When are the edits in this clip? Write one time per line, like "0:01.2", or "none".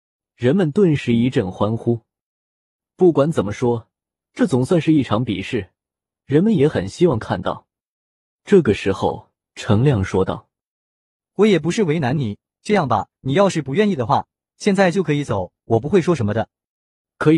none